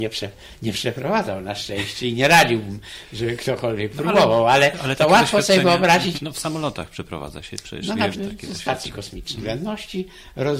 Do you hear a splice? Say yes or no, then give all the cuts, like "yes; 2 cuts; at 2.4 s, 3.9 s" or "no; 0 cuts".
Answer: yes; 3 cuts; at 6.1 s, 8.1 s, 9.4 s